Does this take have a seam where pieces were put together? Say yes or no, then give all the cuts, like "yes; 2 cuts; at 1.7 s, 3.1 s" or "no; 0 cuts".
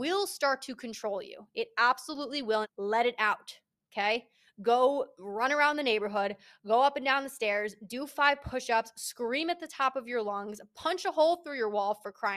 yes; 1 cut; at 2.6 s